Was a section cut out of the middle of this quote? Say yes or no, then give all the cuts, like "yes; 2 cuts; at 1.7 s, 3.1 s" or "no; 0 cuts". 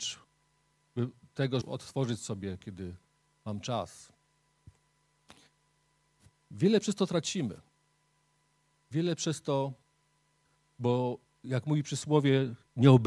yes; 1 cut; at 1.6 s